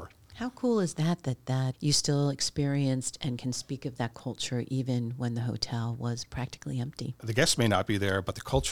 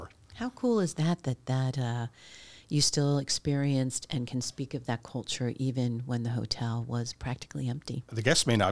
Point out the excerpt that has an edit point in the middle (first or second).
first